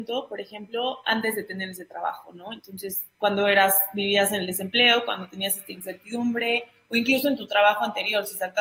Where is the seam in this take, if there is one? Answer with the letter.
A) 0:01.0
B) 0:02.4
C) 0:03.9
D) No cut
D